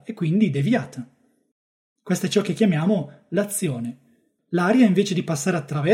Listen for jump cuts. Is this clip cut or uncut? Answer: cut